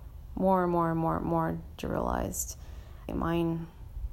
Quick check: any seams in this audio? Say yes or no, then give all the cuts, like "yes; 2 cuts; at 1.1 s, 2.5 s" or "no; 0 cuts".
yes; 1 cut; at 3.1 s